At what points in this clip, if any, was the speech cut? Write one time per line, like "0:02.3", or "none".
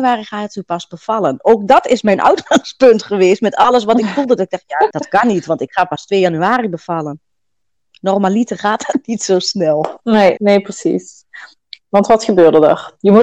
0:04.9
0:10.4